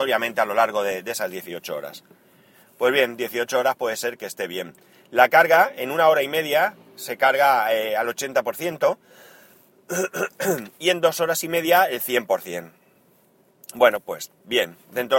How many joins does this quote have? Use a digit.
0